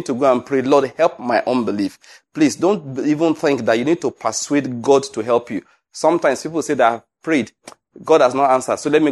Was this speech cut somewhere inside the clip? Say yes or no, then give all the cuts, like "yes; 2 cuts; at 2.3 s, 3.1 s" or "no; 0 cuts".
no; 0 cuts